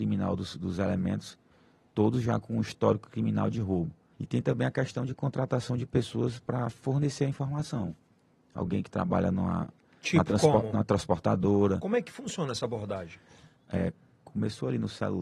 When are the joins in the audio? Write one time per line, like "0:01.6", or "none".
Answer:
0:04.1
0:13.6